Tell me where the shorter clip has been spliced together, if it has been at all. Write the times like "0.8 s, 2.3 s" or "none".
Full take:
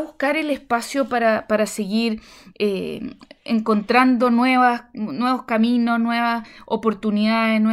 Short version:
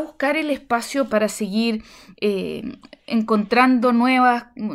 1.1 s